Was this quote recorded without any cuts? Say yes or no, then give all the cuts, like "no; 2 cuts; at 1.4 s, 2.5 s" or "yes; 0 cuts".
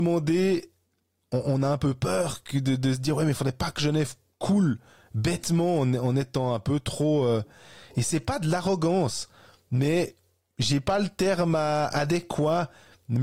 yes; 0 cuts